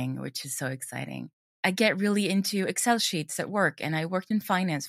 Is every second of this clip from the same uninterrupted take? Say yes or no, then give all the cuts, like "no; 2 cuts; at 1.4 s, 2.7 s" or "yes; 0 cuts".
no; 1 cut; at 1.5 s